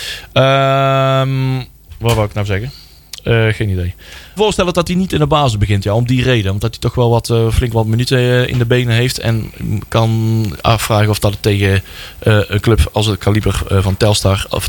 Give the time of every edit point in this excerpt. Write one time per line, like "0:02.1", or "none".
0:04.4